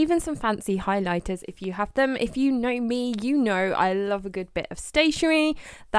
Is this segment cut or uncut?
uncut